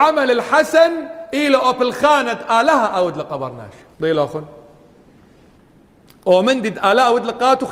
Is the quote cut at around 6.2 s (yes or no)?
no